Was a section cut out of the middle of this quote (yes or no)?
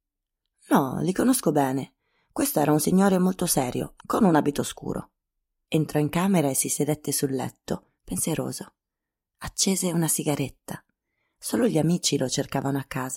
yes